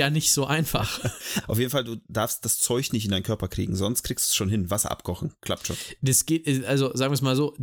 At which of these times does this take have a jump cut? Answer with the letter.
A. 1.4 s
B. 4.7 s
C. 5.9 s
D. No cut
A